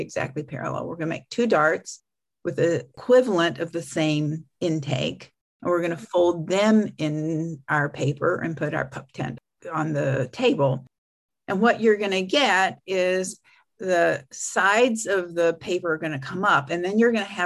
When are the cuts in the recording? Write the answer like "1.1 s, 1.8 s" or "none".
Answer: none